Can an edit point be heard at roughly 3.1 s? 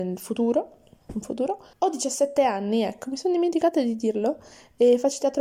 no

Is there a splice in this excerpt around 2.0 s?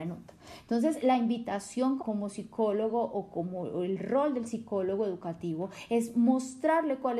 yes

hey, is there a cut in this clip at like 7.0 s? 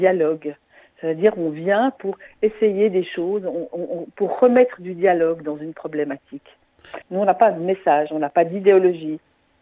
yes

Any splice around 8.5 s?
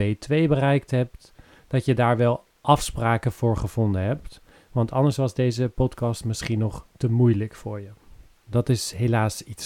yes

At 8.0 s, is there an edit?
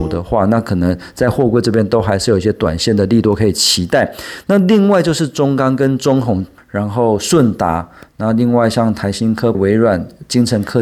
no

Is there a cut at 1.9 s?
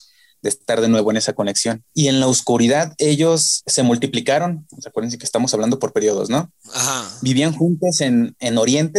yes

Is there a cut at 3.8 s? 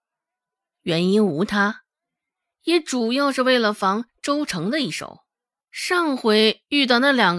no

